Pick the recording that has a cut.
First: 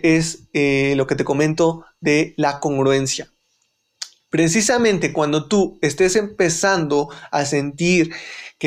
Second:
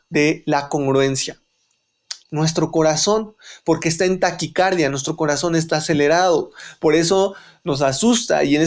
second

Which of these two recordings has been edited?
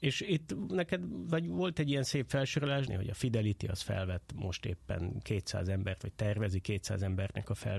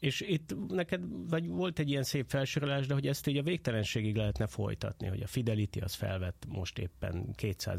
first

